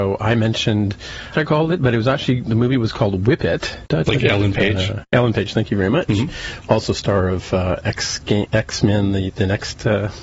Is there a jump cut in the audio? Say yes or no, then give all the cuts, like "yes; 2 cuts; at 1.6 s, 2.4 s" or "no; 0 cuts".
yes; 2 cuts; at 1.3 s, 3.9 s